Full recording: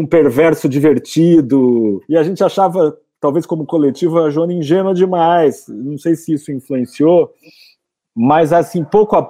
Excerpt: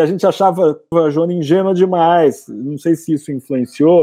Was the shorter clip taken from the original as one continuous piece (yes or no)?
no